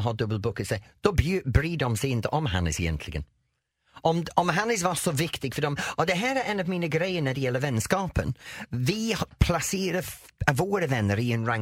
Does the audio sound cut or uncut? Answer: uncut